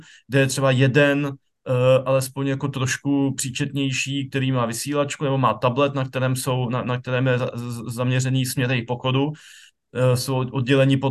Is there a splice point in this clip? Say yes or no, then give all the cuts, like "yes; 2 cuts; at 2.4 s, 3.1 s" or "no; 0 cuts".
no; 0 cuts